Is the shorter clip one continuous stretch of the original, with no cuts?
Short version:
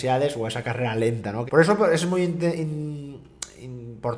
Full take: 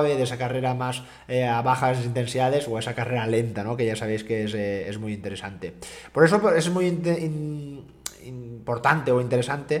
no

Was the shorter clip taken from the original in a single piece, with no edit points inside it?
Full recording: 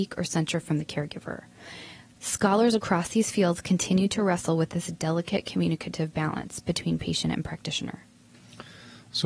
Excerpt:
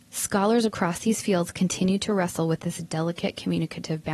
yes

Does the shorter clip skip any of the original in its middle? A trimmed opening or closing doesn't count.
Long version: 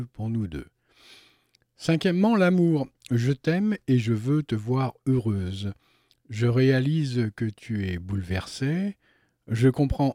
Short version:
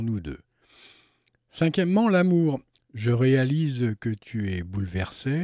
yes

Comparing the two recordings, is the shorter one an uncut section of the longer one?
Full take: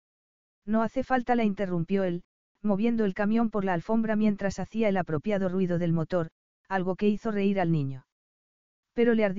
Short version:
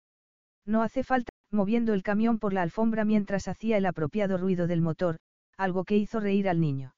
no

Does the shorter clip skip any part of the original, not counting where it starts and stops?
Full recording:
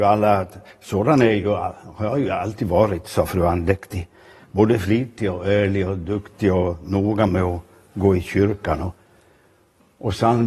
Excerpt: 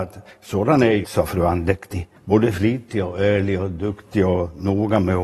yes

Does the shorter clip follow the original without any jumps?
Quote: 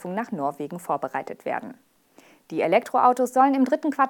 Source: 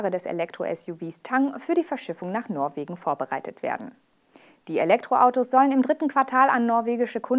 yes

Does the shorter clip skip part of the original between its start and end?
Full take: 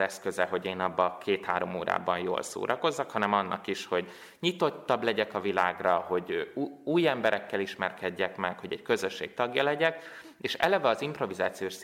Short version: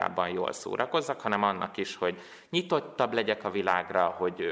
no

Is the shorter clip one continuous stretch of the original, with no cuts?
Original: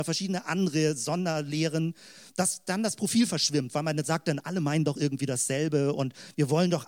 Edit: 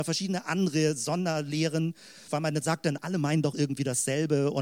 no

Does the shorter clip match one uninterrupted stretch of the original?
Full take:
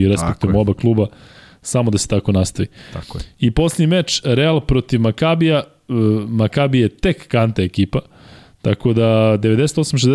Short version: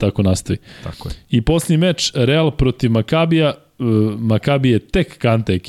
yes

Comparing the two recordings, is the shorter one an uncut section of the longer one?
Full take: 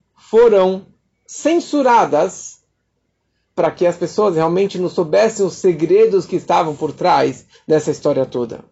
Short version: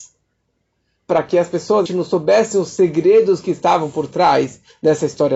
no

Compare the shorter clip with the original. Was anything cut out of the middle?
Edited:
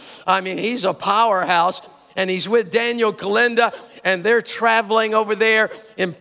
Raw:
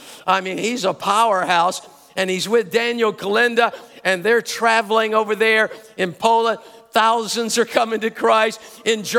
no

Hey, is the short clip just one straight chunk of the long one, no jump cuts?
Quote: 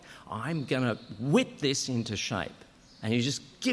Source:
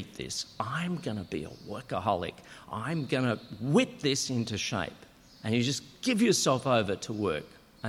yes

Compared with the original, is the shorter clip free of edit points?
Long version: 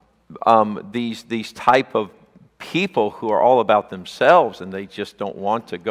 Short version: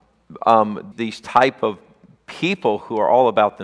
no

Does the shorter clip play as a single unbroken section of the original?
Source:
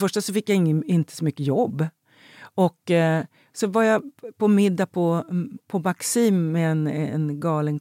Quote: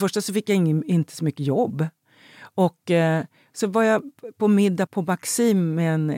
no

